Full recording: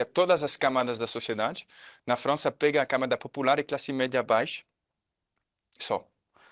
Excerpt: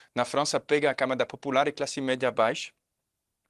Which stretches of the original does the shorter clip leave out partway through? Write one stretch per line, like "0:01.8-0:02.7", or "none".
none